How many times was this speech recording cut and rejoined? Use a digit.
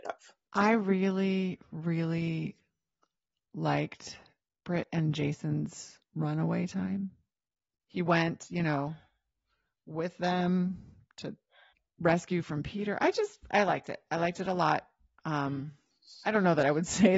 1